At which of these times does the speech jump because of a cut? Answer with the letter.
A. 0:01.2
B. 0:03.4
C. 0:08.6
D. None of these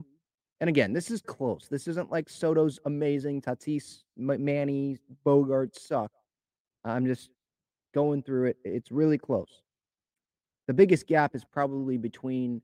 A